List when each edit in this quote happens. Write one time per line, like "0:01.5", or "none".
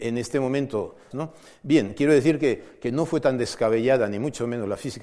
0:01.1